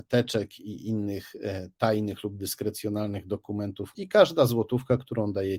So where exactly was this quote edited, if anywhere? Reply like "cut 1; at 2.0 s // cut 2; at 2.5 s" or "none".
cut 1; at 3.9 s